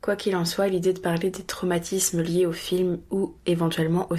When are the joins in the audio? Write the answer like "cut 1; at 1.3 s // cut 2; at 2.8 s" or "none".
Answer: none